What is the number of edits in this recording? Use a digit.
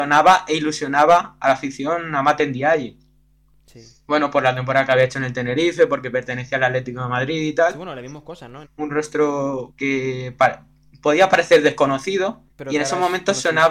3